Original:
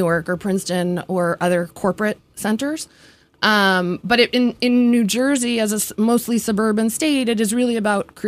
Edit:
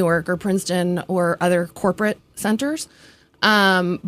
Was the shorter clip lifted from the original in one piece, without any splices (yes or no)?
yes